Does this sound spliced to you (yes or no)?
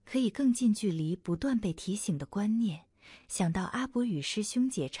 no